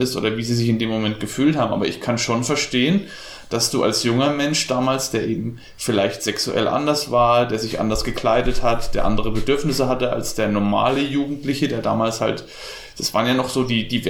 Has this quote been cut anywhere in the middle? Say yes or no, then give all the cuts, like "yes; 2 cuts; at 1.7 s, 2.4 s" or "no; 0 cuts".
no; 0 cuts